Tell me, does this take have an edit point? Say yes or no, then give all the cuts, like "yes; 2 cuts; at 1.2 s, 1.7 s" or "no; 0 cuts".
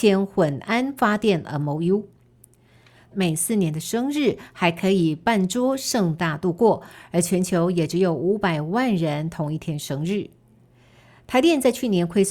yes; 1 cut; at 3.1 s